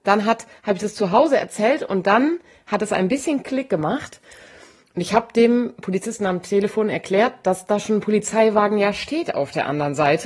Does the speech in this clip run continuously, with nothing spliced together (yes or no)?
yes